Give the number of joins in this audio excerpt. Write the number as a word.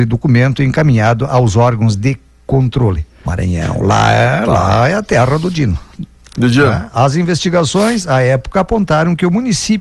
one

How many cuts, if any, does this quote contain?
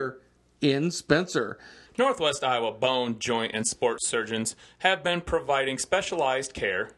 one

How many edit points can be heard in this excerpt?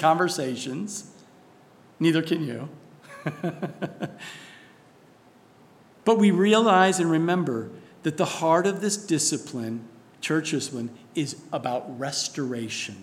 zero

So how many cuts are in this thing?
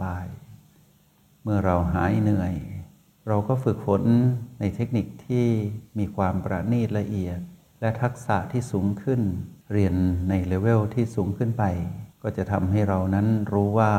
two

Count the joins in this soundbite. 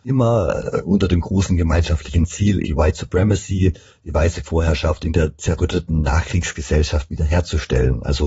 one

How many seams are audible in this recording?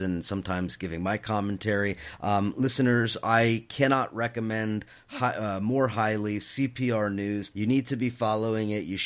one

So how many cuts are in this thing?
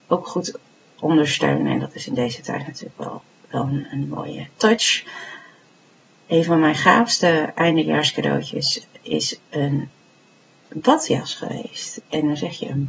zero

